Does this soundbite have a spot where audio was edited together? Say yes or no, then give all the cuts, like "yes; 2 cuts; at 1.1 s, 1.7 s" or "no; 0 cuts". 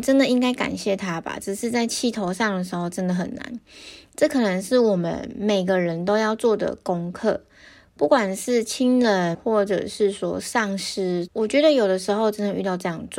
yes; 2 cuts; at 9.3 s, 11.3 s